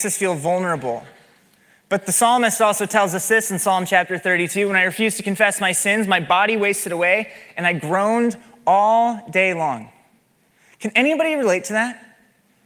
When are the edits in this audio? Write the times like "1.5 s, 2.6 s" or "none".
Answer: none